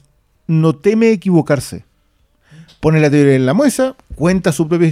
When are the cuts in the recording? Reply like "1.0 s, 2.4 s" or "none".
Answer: none